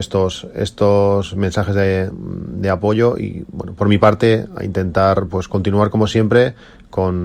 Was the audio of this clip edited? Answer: no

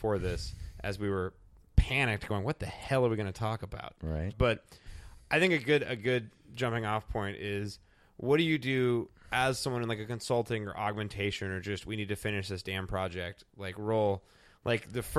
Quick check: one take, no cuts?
no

